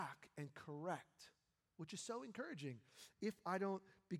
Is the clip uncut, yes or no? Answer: no